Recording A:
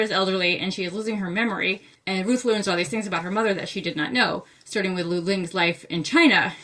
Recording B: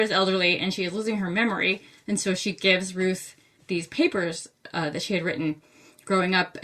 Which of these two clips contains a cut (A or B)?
A